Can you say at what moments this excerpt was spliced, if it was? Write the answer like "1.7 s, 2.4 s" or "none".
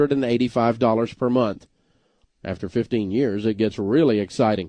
2.2 s